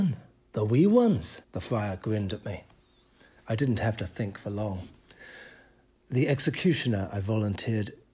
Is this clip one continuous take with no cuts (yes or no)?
no